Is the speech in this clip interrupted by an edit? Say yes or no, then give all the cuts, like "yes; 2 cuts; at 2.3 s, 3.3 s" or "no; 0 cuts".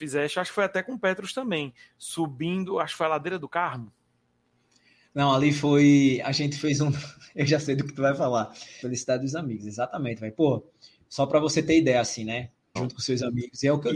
yes; 2 cuts; at 8.8 s, 12.8 s